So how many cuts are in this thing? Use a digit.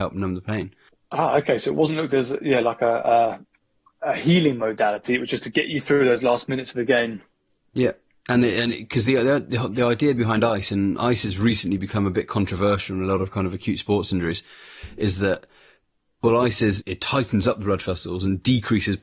1